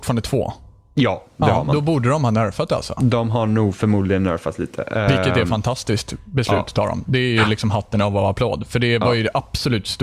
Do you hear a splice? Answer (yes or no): no